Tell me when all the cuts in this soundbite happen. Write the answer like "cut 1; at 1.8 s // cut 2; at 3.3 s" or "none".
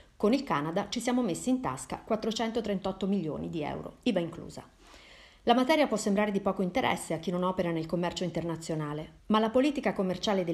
cut 1; at 9.2 s